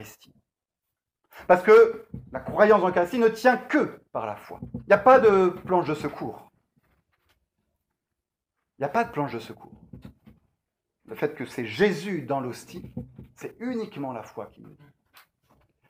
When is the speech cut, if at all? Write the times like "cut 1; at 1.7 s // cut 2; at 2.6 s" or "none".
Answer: cut 1; at 4.1 s